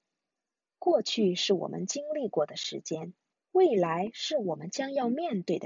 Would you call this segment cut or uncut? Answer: cut